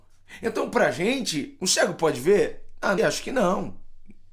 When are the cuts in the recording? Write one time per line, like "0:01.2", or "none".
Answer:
0:03.0